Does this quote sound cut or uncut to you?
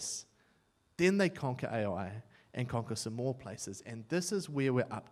uncut